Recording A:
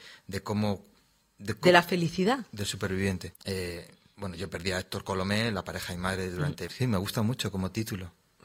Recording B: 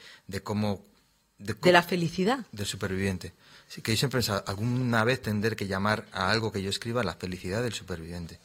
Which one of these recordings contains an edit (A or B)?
A